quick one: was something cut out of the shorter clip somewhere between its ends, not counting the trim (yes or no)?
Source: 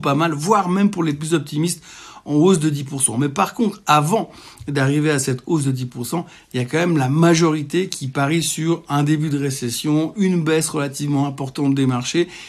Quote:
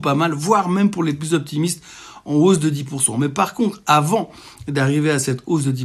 no